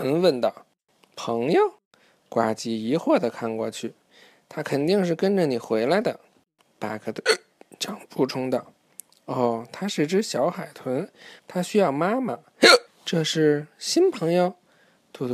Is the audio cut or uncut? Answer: cut